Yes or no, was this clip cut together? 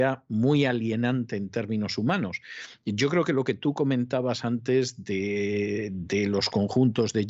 no